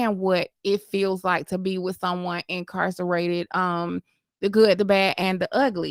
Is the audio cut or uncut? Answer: uncut